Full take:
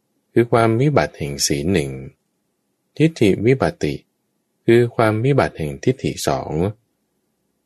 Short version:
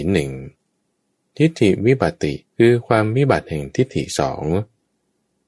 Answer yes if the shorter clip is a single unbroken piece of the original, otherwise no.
no